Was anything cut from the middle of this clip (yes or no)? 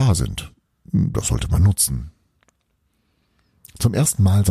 no